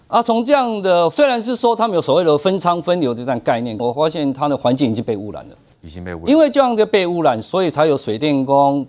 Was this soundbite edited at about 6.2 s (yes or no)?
no